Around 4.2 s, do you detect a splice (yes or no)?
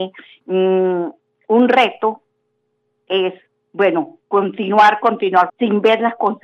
yes